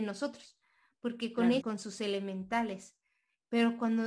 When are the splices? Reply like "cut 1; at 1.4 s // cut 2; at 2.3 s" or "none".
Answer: cut 1; at 1.6 s